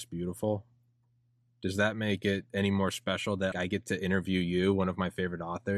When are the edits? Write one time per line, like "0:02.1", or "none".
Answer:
0:03.5